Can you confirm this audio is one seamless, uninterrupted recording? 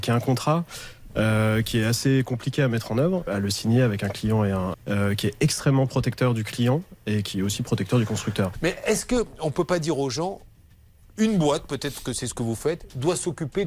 no; 3 cuts; at 3.3 s, 4.7 s, 8.5 s

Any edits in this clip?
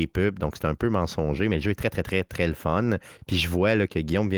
no; 0 cuts

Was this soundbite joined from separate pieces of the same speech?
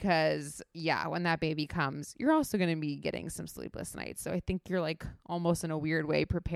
no; 0 cuts

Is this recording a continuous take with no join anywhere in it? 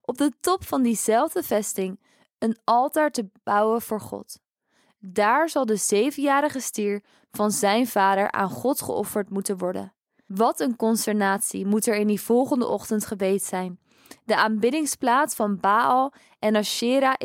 no; 1 cut; at 10.3 s

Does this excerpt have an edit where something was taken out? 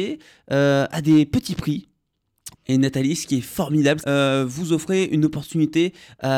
yes; 2 cuts; at 2.5 s, 4.0 s

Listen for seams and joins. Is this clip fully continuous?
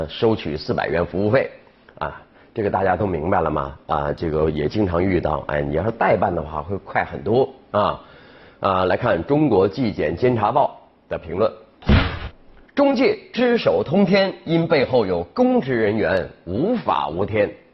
yes; 0 cuts

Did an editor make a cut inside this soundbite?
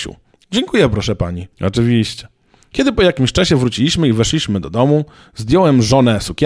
yes; 1 cut; at 1.5 s

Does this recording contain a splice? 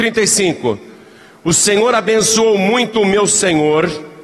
no; 0 cuts

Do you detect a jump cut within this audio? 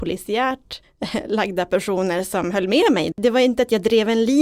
yes; 1 cut; at 3.1 s

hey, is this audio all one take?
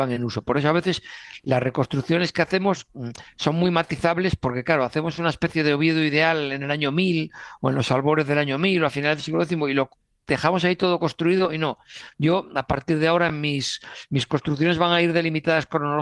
yes; 0 cuts

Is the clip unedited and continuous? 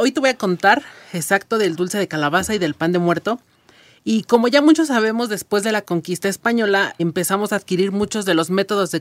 no; 1 cut; at 7.0 s

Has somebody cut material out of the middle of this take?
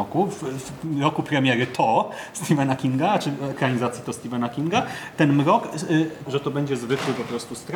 yes; 1 cut; at 6.3 s

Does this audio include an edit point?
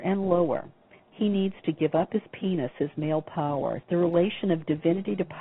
yes; 2 cuts; at 1.1 s, 3.8 s

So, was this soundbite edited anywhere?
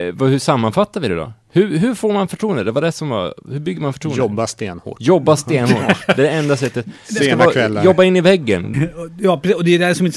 yes; 1 cut; at 8.7 s

